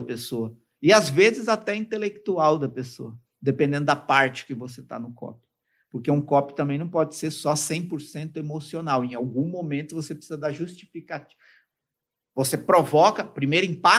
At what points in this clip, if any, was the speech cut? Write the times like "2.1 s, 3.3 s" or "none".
none